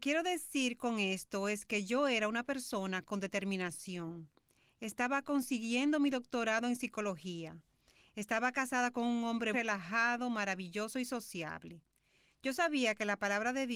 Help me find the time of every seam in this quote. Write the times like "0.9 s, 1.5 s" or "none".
9.5 s